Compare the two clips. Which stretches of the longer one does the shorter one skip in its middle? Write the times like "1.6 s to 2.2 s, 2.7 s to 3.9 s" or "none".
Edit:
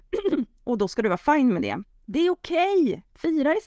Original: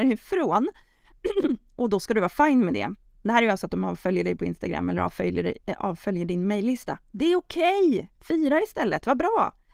3.1 s to 7.0 s